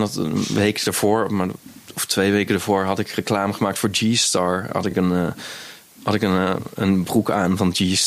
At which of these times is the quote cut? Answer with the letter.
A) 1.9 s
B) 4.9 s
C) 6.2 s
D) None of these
D